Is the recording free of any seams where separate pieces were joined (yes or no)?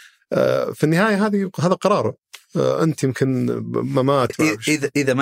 no